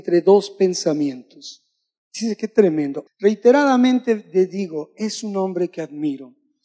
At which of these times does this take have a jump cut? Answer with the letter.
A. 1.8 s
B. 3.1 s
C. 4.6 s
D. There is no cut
B